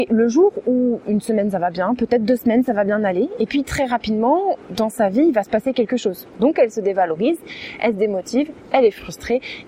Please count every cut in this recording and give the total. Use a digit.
1